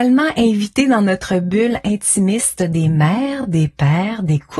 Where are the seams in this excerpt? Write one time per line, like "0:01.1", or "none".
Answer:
none